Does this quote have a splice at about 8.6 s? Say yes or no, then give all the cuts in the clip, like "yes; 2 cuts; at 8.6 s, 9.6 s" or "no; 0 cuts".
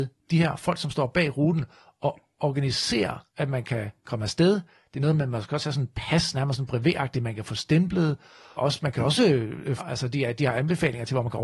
yes; 3 cuts; at 3.3 s, 8.6 s, 9.8 s